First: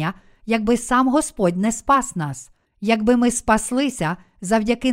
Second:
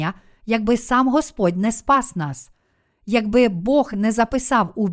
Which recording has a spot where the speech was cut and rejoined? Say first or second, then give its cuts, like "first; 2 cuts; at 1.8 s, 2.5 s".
first; 1 cut; at 2.6 s